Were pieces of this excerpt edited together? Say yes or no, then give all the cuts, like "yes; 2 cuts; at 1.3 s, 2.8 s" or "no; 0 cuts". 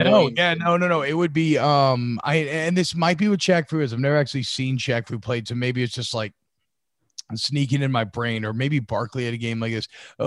no; 0 cuts